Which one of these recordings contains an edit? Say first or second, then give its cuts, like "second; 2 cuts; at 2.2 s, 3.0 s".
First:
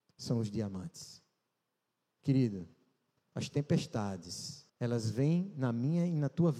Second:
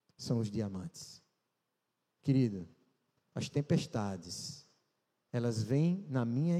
first; 1 cut; at 4.7 s